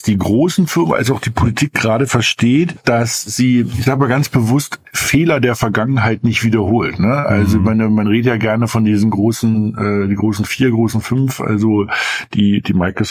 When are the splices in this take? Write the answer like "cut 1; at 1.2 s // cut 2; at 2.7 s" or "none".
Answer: none